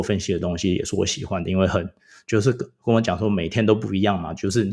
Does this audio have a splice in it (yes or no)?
no